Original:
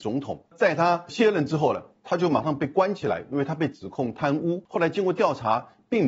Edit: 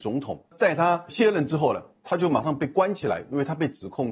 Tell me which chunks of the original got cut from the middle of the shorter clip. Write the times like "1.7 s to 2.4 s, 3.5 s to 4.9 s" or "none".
none